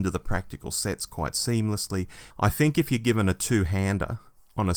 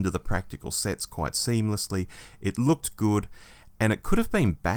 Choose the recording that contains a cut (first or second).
first